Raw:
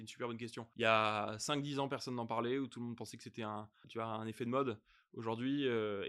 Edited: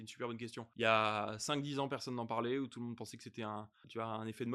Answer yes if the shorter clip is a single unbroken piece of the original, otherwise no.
yes